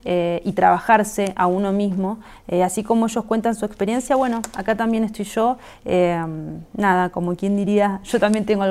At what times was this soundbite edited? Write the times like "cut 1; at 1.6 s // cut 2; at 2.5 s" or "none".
none